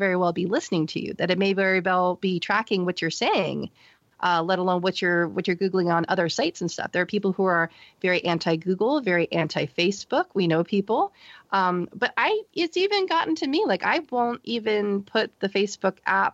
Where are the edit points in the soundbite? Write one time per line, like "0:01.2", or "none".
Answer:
none